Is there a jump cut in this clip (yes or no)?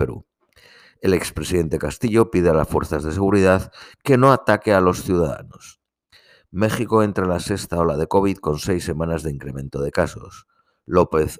no